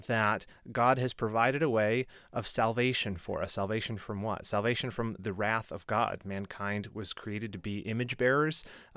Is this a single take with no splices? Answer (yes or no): yes